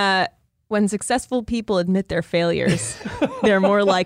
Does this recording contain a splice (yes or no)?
no